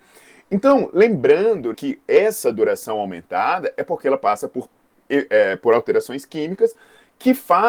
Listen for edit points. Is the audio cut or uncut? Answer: cut